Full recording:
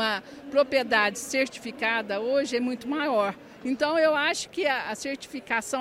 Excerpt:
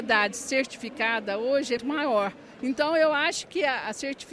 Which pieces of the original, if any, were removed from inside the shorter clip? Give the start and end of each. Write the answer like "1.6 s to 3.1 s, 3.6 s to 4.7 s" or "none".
2.6 s to 2.8 s